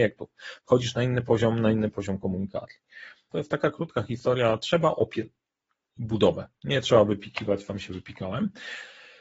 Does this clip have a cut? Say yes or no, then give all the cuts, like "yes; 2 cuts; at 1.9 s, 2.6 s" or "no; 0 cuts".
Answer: yes; 1 cut; at 3.3 s